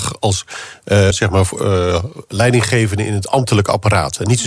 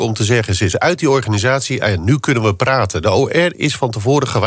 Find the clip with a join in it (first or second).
first